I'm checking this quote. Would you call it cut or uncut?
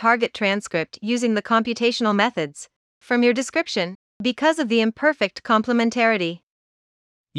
uncut